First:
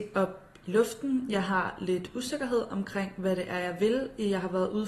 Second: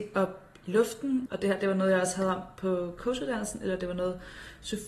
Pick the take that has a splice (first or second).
second